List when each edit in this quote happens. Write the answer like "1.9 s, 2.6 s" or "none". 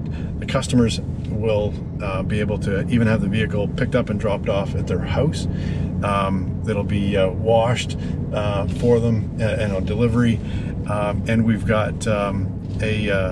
none